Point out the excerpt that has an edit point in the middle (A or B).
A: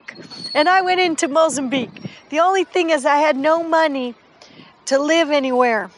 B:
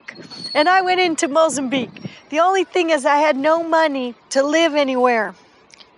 B